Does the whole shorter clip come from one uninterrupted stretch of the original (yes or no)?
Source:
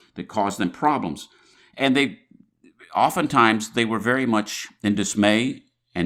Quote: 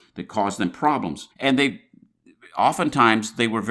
no